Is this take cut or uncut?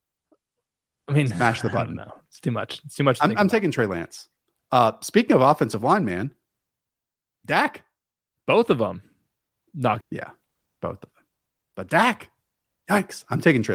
cut